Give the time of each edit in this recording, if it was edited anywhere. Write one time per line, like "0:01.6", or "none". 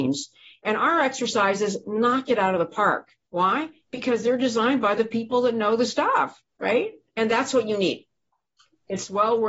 none